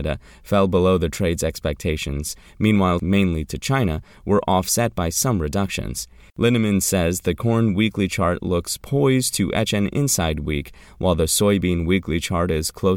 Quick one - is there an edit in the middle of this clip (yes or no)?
yes